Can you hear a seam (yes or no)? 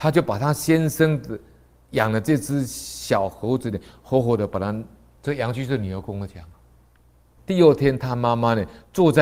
yes